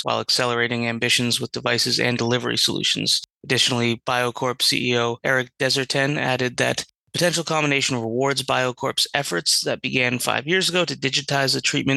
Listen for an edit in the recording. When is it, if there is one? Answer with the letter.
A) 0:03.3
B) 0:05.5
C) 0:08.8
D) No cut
D